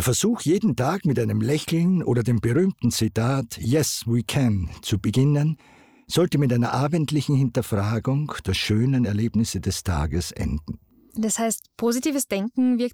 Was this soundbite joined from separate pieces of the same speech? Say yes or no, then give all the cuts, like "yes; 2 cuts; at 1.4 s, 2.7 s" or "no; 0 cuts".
no; 0 cuts